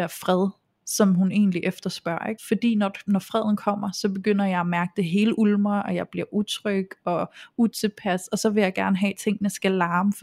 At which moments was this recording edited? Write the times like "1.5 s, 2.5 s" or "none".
2.4 s